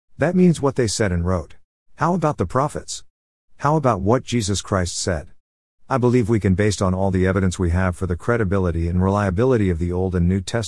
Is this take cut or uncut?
cut